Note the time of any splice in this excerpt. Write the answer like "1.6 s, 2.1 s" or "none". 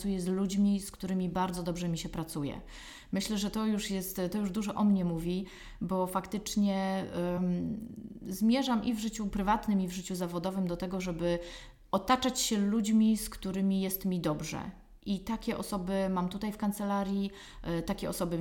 none